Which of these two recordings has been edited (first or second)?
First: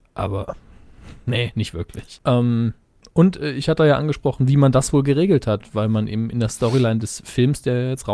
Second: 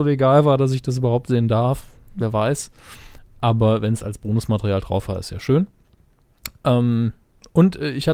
first